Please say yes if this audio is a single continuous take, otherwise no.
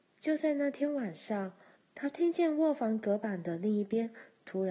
no